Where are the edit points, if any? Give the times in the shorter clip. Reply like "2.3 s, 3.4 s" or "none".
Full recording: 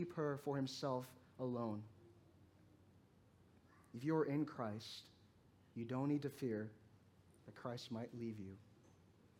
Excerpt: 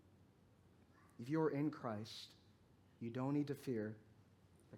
none